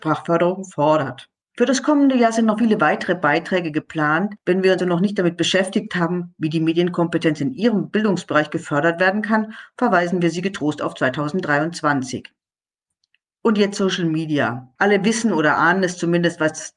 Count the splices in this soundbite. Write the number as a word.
one